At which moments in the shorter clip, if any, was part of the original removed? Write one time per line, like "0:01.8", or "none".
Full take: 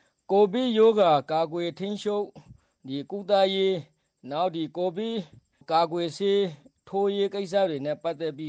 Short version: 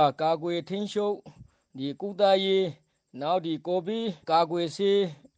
0:04.2